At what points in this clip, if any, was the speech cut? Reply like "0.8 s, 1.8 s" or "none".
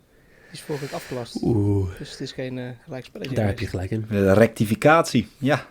none